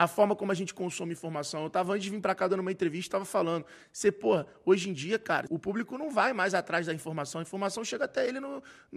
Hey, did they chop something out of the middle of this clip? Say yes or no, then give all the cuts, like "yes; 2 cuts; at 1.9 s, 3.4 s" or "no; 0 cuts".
yes; 1 cut; at 5.5 s